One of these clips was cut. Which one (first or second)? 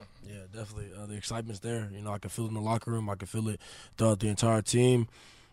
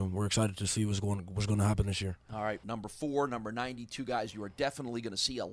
second